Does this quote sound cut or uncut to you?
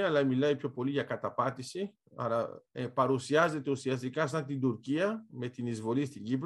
uncut